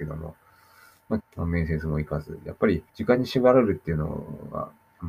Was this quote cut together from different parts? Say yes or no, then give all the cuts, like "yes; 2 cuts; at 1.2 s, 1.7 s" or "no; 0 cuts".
yes; 2 cuts; at 1.2 s, 2.9 s